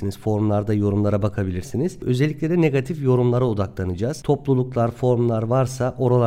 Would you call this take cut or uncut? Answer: uncut